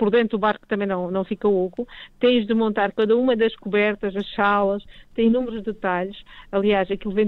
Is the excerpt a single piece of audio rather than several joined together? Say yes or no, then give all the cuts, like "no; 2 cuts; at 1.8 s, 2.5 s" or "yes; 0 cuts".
yes; 0 cuts